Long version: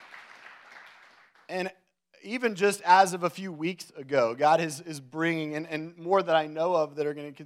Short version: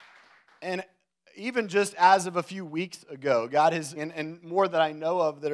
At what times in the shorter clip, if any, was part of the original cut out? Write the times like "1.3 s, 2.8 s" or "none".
4.0 s